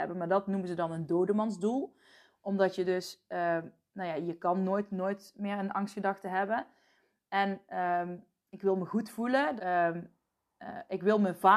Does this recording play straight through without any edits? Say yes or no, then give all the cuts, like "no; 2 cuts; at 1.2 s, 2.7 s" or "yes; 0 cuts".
no; 1 cut; at 9.6 s